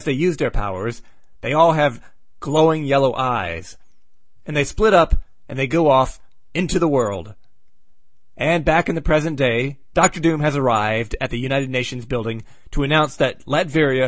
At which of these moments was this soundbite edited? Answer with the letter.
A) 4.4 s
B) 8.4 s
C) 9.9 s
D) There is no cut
C